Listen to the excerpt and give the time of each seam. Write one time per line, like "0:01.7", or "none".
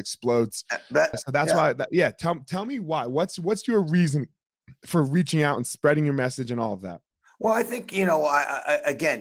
0:01.1